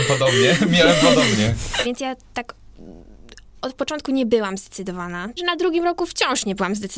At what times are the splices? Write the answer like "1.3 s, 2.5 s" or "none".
1.8 s, 5.4 s